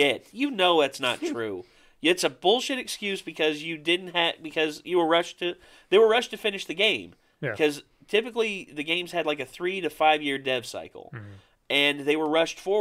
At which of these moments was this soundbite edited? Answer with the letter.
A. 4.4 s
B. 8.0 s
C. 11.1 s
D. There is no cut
D